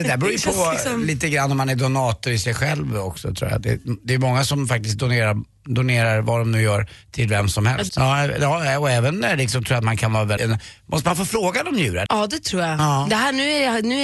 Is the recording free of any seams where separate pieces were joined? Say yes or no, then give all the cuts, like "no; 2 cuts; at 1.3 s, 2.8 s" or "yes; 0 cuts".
no; 3 cuts; at 7.9 s, 10.4 s, 12.1 s